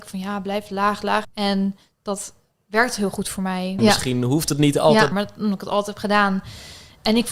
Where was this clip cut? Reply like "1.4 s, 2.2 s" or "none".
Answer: 1.2 s, 3.8 s, 5.1 s